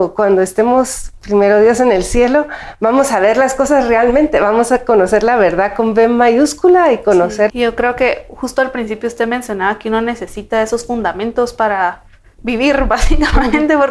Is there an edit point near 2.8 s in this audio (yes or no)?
no